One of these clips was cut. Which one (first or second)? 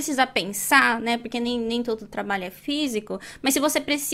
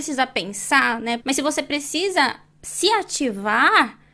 second